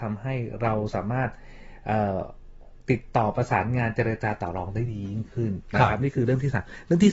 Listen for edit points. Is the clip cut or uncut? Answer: uncut